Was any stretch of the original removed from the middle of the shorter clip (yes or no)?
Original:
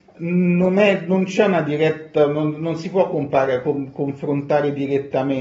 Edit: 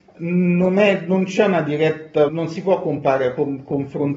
yes